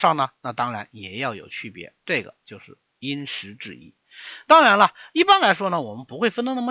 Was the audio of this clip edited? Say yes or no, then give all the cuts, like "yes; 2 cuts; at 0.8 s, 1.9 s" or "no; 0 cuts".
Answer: no; 0 cuts